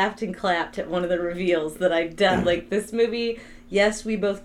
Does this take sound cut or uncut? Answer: uncut